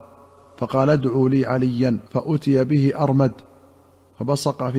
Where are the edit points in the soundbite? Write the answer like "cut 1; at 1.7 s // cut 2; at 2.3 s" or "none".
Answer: cut 1; at 2.1 s